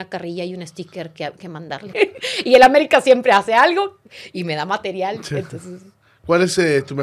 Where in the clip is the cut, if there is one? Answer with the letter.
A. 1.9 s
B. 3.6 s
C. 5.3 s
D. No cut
A